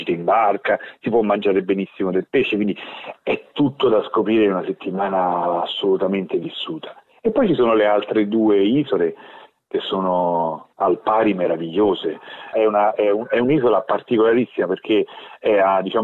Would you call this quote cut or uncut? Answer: cut